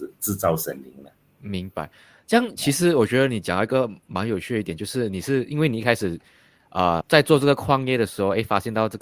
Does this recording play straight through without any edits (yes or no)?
no